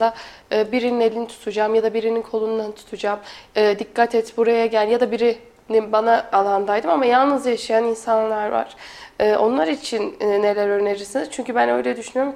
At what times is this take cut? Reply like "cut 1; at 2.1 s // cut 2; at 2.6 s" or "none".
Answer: cut 1; at 6.3 s